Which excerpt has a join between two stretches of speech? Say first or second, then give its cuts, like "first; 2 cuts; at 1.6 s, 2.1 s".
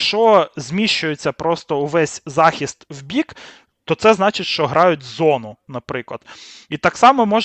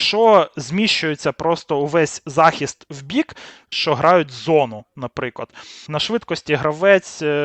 second; 2 cuts; at 3.7 s, 5.9 s